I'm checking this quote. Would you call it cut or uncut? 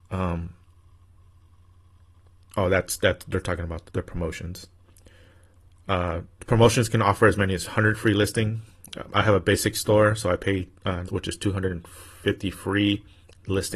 cut